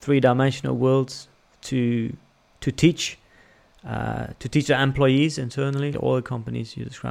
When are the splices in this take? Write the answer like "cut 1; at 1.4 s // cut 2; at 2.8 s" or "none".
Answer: cut 1; at 5.9 s